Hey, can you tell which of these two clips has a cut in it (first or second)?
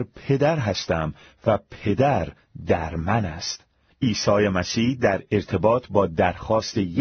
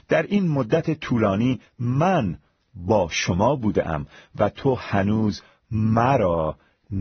first